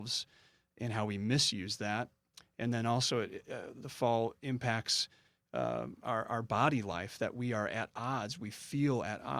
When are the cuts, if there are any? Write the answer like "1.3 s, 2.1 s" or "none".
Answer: none